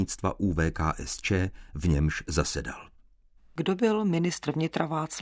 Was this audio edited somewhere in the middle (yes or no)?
no